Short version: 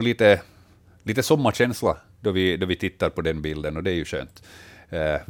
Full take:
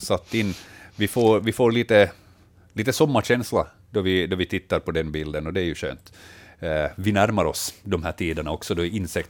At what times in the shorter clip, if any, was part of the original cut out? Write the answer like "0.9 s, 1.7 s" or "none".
none

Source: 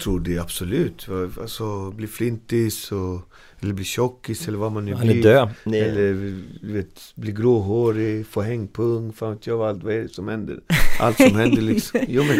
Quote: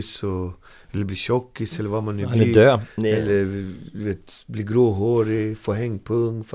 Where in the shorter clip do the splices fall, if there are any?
none

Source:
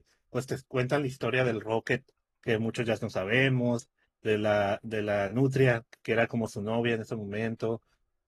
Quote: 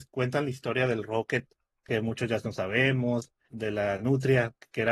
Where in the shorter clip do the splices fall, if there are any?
3.5 s

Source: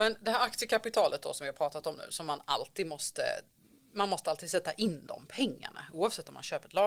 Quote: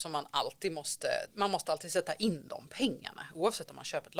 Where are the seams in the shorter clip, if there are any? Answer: 1.3 s

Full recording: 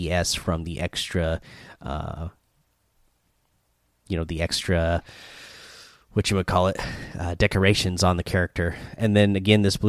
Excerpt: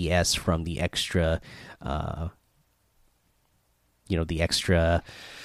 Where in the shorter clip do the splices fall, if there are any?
none

